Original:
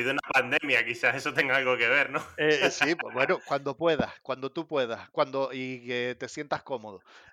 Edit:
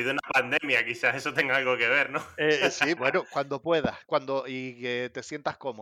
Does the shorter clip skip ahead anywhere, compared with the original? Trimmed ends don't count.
yes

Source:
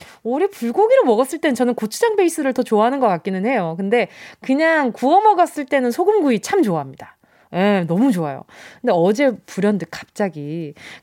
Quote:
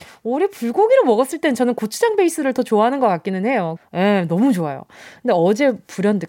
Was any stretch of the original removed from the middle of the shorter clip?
yes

